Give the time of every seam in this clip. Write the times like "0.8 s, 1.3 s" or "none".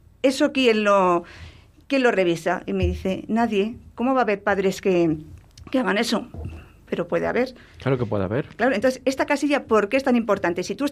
none